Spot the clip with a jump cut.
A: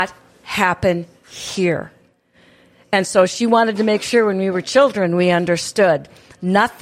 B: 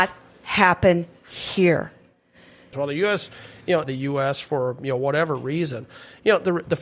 B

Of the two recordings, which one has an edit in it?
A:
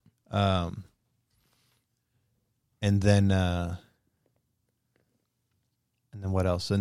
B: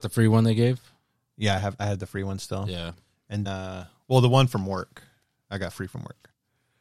B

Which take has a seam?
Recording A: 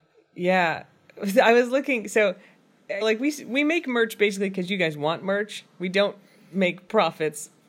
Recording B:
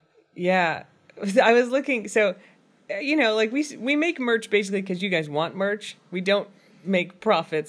A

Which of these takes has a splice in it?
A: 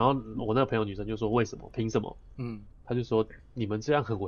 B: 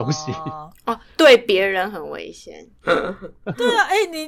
B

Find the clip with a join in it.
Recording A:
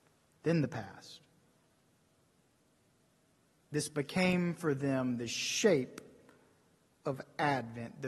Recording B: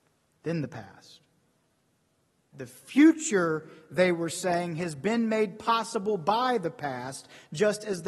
B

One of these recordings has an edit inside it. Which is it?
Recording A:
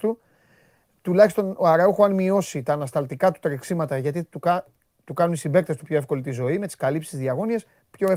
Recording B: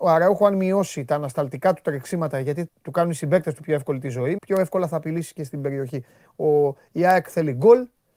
B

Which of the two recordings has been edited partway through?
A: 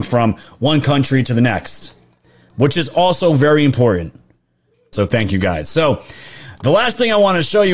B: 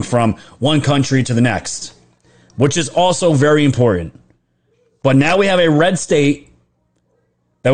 A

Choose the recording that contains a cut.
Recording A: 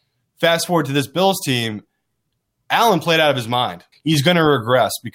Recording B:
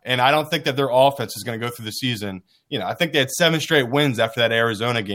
A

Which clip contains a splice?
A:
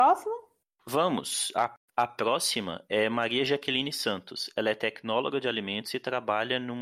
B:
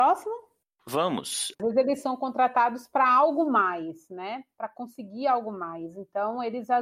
B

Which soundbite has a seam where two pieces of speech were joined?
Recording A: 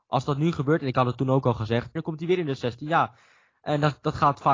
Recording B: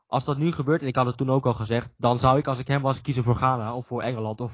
A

